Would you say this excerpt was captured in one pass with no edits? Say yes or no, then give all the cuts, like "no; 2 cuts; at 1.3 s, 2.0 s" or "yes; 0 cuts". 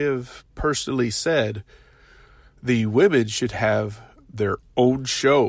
yes; 0 cuts